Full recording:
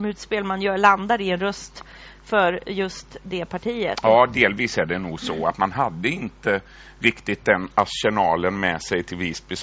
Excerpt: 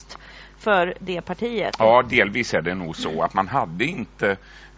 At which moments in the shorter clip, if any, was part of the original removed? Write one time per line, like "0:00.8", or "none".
0:01.0

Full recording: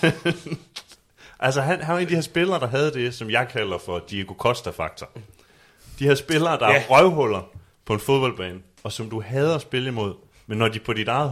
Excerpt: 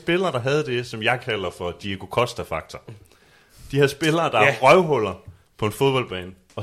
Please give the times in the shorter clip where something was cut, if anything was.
none

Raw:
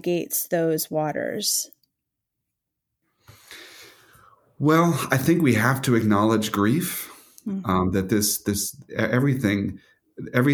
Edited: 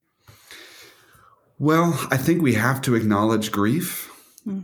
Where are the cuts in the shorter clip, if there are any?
none

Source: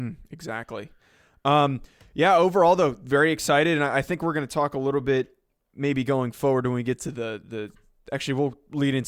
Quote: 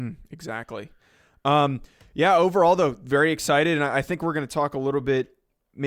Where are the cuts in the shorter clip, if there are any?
none

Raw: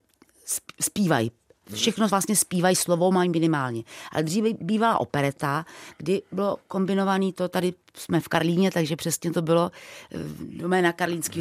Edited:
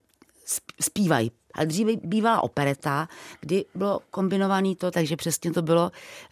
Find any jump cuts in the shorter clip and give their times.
0:01.5
0:04.9

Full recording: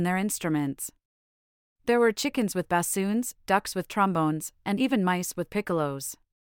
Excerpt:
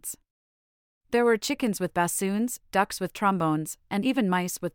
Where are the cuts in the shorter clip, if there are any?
none

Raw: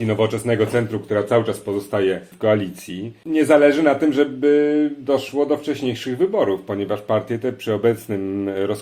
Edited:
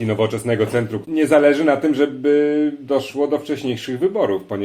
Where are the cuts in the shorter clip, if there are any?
0:01.0

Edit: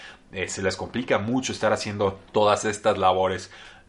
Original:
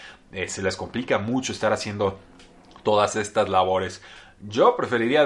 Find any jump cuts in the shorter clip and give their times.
0:02.3

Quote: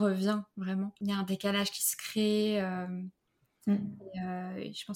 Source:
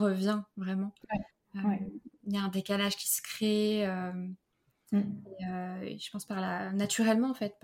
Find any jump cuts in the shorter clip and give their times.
0:01.0

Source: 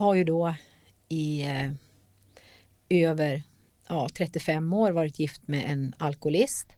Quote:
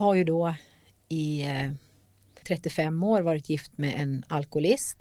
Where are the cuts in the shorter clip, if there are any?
0:02.4

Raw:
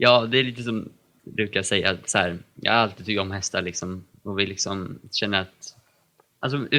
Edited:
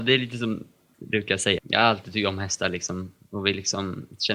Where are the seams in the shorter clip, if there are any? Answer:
0:01.6

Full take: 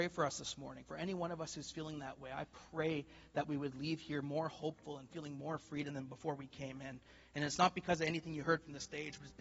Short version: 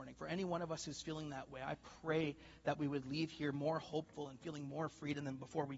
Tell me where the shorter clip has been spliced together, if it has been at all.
none

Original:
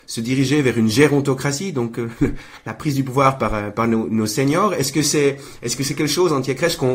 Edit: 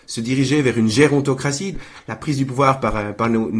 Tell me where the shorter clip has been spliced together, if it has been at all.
0:01.7

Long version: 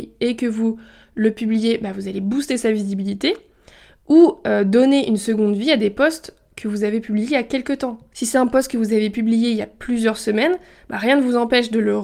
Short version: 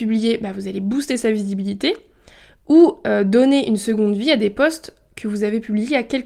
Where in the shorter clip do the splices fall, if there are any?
none

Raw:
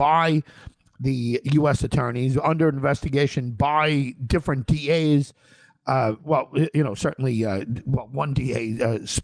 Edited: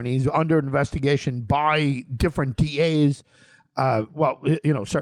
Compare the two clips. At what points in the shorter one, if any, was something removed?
none

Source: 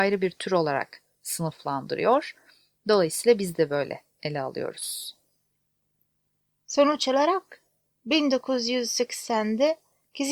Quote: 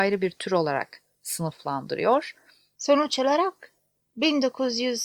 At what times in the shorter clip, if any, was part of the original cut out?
0:02.8

